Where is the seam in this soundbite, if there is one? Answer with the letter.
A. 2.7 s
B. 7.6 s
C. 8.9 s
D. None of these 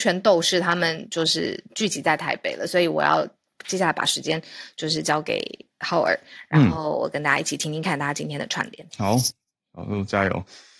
C